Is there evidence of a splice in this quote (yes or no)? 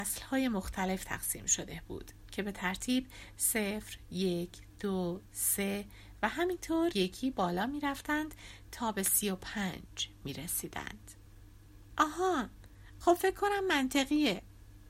yes